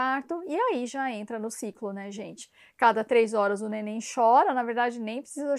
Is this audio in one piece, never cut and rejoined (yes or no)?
yes